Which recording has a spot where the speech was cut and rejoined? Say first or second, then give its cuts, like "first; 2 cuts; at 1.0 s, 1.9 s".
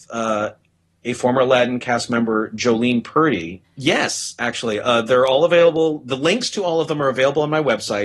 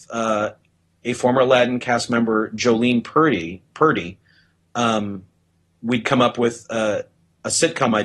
first; 1 cut; at 3.6 s